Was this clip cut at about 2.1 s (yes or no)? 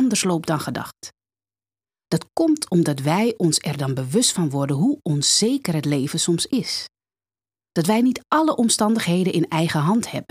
no